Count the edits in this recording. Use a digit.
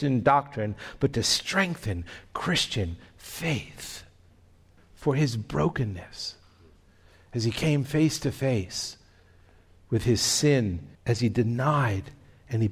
2